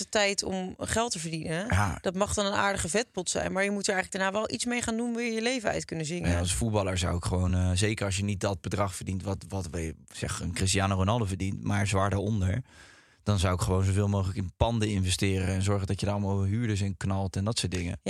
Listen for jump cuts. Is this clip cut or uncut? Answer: uncut